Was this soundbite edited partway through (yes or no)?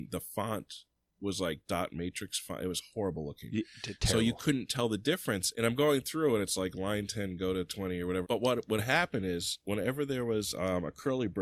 yes